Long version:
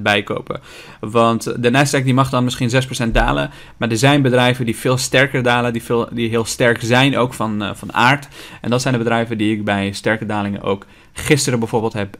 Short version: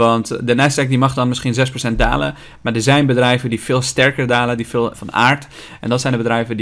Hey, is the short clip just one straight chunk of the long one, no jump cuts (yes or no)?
no